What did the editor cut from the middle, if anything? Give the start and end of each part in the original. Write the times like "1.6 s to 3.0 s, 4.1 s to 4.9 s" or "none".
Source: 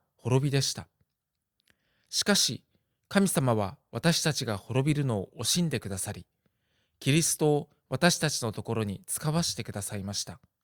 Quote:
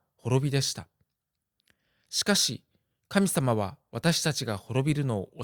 none